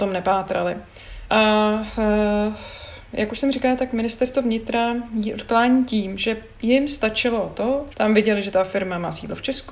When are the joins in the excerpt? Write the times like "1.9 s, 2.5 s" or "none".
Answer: 1.3 s, 7.9 s